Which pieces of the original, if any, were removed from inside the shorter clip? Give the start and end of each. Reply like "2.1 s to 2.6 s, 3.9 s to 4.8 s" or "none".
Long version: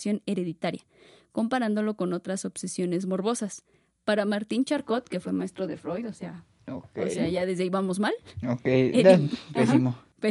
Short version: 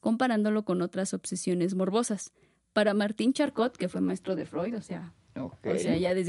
none